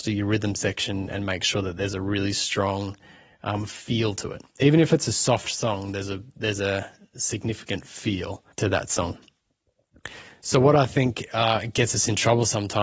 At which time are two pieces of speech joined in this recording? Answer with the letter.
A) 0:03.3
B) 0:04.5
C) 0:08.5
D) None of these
C